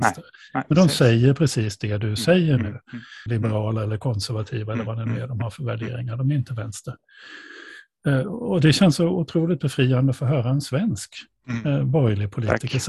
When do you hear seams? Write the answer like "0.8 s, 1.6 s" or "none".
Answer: 3.3 s